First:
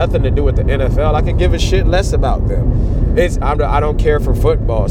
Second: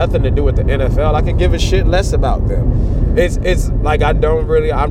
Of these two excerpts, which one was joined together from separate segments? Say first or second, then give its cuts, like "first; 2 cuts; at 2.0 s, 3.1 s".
first; 1 cut; at 3.4 s